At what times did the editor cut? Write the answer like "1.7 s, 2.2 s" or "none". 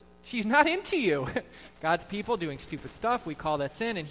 1.7 s